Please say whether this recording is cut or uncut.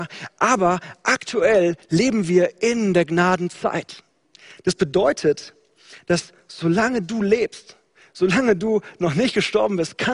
uncut